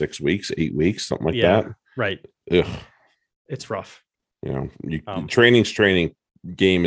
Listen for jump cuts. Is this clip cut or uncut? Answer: uncut